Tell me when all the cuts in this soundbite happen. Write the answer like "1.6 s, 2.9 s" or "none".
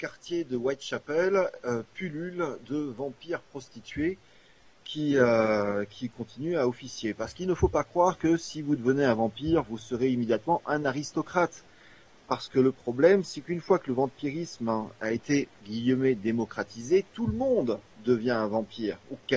none